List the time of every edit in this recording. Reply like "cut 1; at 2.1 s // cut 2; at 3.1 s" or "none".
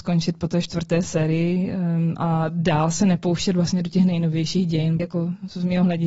cut 1; at 2.2 s // cut 2; at 5.0 s